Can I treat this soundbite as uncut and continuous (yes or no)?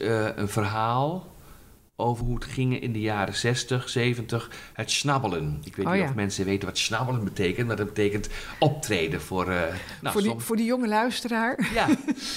no